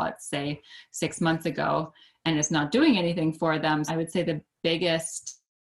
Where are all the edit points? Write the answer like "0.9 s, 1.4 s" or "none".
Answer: 3.9 s